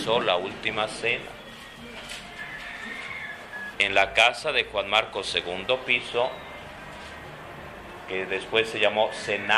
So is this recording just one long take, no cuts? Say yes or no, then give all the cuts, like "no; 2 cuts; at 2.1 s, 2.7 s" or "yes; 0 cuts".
no; 1 cut; at 3.7 s